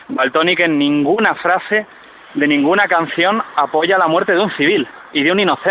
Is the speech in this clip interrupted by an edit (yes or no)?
no